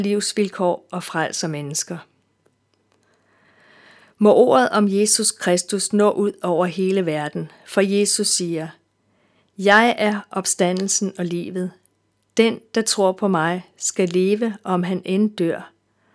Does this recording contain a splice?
no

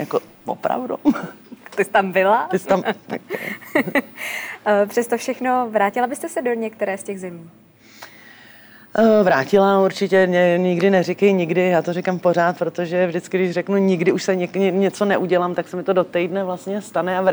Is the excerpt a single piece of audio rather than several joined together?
yes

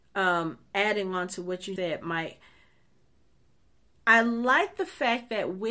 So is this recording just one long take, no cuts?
no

